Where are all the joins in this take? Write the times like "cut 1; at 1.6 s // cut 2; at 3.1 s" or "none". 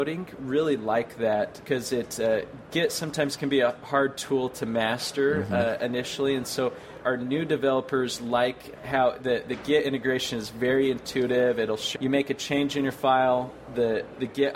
cut 1; at 12.0 s